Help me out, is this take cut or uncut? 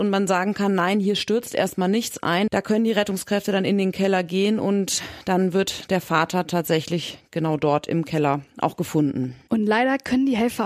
cut